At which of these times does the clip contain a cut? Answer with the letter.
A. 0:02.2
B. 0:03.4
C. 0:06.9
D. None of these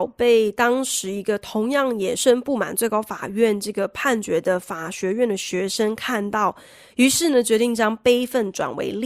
A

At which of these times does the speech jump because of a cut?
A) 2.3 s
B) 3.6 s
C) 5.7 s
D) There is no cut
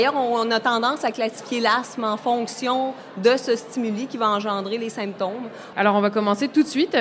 C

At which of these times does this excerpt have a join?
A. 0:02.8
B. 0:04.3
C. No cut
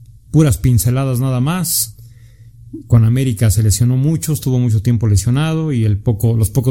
C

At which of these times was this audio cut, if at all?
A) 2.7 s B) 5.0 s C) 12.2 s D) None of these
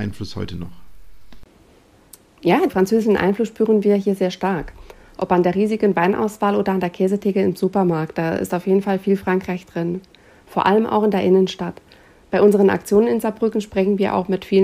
A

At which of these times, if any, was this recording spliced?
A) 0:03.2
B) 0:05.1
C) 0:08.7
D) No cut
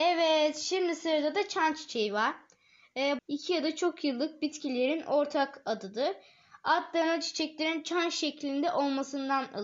A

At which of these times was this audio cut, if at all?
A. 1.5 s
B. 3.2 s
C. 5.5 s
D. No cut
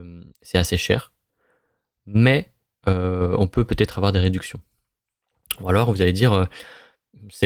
D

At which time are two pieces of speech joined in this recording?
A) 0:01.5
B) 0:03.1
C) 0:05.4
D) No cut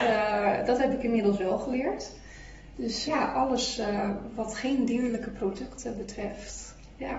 B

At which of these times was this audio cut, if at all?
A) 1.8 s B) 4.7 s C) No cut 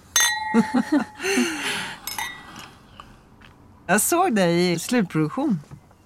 B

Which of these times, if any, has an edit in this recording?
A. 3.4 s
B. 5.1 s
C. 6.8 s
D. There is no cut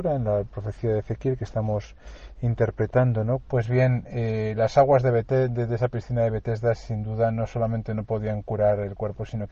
A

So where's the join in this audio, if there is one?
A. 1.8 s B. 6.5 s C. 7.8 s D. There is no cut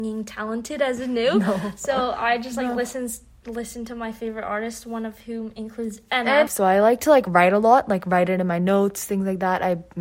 B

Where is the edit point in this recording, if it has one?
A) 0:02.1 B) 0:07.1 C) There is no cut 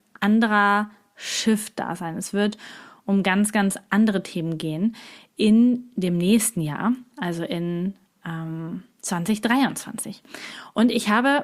C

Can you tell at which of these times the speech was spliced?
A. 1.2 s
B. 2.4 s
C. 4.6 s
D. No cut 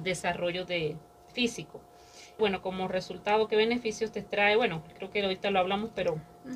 B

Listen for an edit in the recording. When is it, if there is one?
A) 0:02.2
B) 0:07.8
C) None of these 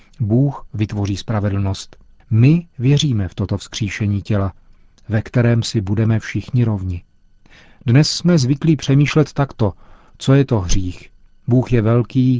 A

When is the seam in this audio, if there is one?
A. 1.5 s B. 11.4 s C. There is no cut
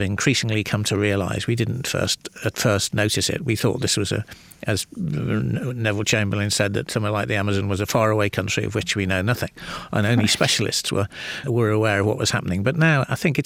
B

